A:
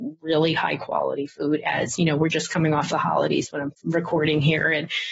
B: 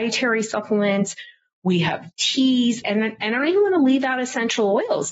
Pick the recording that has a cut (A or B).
B